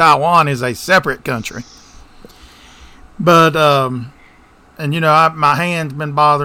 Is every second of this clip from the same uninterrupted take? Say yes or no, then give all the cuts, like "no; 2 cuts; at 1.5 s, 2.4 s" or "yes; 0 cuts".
no; 1 cut; at 4.7 s